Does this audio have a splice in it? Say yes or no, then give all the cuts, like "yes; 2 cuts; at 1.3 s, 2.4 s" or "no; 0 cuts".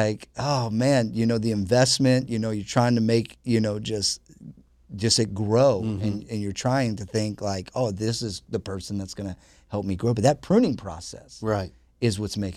no; 0 cuts